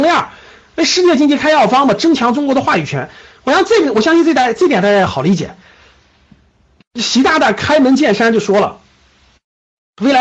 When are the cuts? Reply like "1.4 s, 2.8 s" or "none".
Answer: none